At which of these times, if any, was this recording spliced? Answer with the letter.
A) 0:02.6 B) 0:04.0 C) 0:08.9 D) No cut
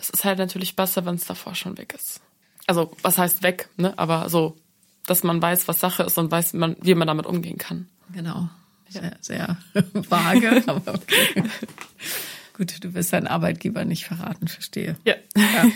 C